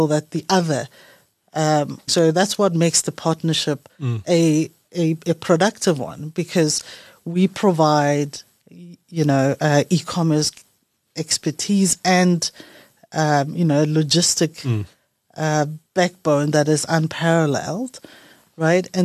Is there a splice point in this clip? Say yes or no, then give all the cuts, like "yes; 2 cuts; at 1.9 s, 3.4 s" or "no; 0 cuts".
yes; 1 cut; at 2.1 s